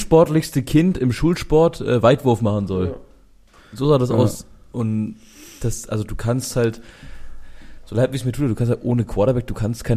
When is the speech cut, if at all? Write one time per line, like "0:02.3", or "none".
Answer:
none